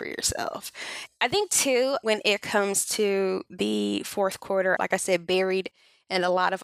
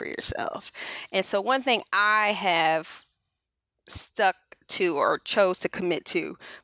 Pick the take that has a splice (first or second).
first